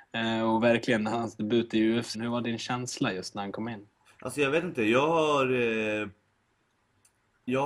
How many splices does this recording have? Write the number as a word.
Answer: one